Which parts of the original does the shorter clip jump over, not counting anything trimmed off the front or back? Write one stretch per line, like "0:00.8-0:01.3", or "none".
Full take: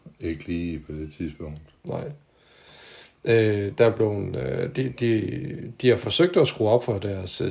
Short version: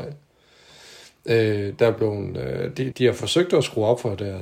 0:04.9-0:05.7